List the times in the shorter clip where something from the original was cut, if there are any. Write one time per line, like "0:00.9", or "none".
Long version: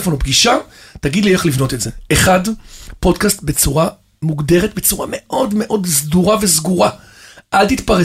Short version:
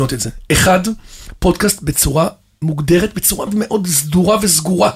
0:03.5